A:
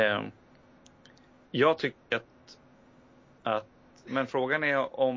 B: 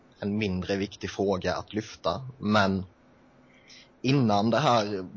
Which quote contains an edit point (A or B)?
A